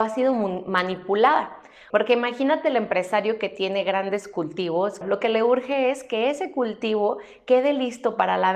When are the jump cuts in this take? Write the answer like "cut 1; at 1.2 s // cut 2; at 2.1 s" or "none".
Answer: cut 1; at 1.9 s // cut 2; at 5.0 s